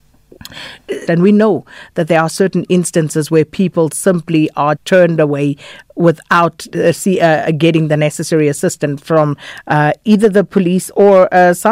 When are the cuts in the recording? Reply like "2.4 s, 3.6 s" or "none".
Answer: 1.1 s, 4.8 s